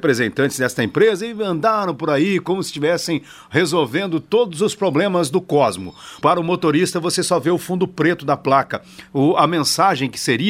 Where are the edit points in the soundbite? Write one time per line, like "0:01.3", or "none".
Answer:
0:06.2